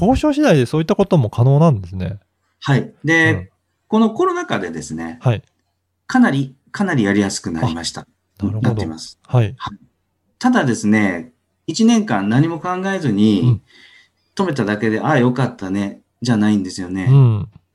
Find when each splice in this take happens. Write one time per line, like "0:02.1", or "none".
none